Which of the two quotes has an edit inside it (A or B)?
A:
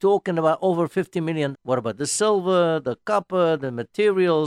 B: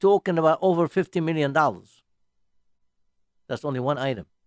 A